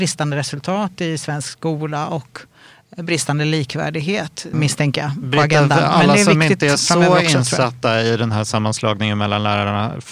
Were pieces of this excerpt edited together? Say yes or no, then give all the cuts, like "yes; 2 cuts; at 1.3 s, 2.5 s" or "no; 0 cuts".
yes; 1 cut; at 4.5 s